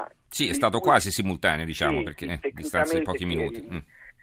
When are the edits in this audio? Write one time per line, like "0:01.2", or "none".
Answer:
none

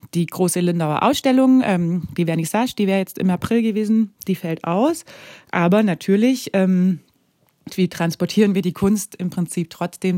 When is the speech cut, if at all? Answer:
0:07.7

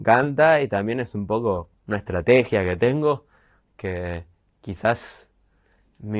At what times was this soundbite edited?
0:01.8

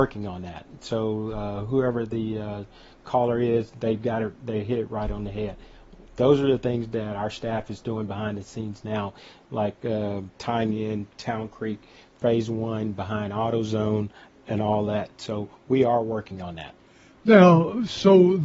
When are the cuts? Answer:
none

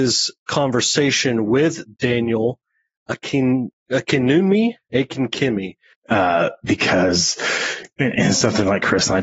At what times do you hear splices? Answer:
0:04.8
0:05.9

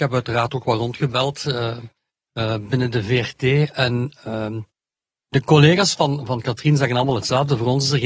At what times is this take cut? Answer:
none

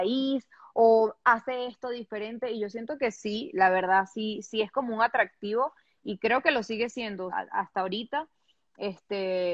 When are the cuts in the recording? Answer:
0:04.4
0:07.3

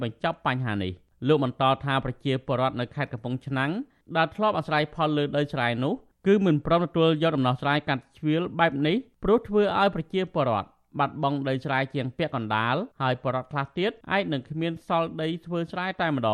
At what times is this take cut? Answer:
0:12.9
0:14.0

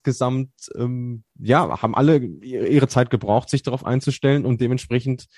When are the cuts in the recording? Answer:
none

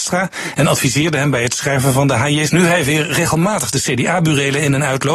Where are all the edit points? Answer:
0:02.5

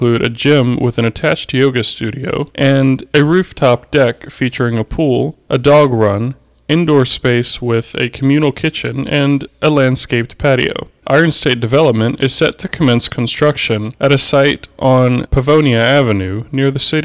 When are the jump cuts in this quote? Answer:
0:11.0
0:12.2

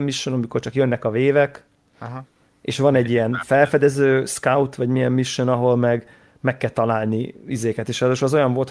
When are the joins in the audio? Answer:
none

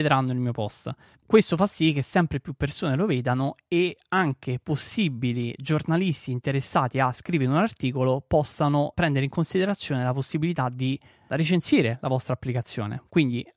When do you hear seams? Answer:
0:01.2
0:08.9

